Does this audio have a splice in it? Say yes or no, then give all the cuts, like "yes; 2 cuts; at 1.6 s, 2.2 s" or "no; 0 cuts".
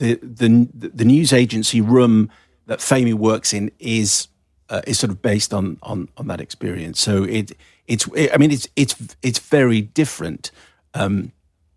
no; 0 cuts